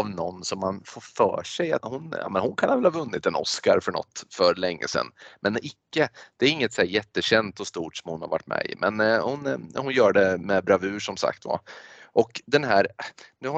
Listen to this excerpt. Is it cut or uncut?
cut